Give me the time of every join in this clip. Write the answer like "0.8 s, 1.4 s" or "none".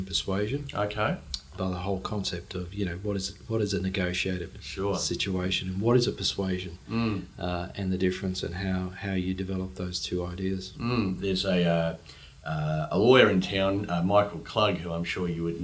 1.5 s